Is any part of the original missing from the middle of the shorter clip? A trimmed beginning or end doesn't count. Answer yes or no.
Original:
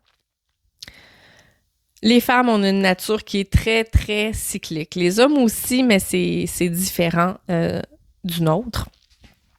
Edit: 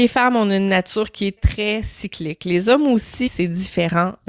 yes